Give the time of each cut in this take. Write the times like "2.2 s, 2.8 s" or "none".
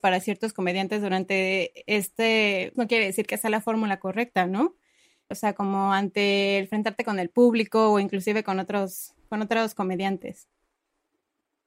2.7 s, 5.3 s